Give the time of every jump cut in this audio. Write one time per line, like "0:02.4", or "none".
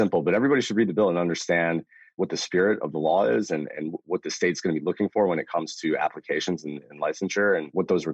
none